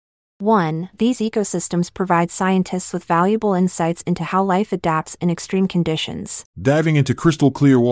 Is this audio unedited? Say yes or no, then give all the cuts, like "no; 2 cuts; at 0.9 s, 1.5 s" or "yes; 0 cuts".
no; 2 cuts; at 0.9 s, 6.5 s